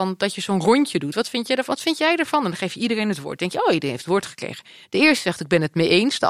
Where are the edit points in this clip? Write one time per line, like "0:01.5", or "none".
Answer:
none